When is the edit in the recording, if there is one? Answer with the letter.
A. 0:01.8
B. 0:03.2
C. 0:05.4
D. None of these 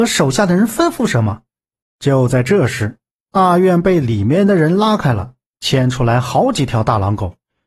A